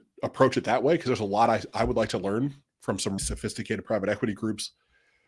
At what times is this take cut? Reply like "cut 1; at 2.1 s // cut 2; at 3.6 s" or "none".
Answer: cut 1; at 3.2 s